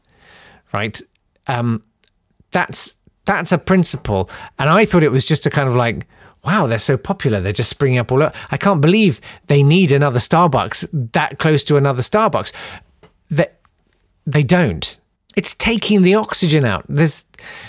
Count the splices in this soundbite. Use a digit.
1